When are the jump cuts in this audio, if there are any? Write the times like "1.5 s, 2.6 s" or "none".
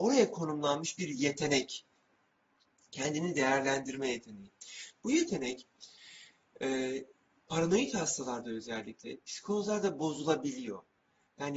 none

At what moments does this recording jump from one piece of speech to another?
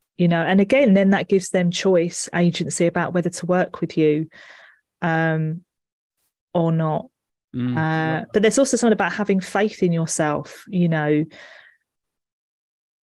none

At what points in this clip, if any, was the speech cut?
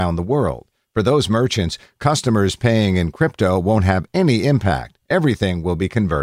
none

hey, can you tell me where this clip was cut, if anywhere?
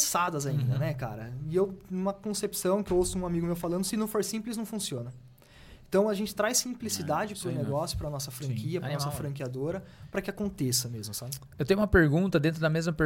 none

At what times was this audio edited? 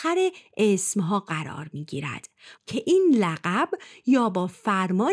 2.6 s

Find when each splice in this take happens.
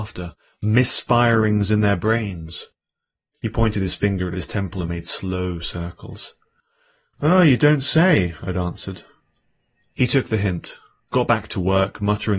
none

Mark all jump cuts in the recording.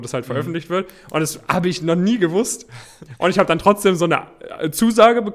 none

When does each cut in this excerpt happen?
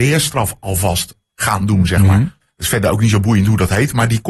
2.4 s

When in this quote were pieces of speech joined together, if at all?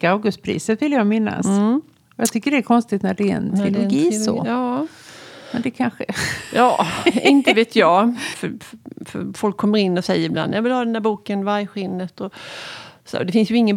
8.3 s

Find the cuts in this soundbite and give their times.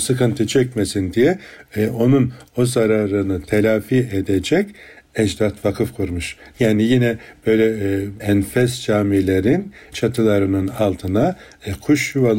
6.5 s, 8.2 s

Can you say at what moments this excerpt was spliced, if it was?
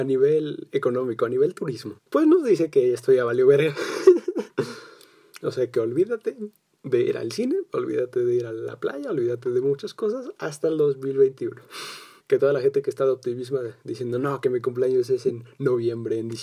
2.0 s

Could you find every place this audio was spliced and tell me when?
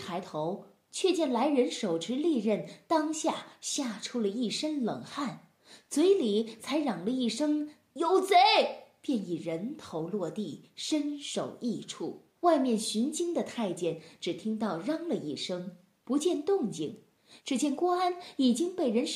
12.3 s, 17.4 s

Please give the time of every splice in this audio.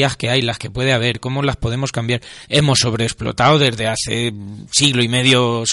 2.5 s

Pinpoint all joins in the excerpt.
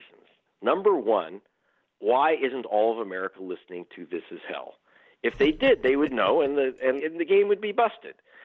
7.0 s

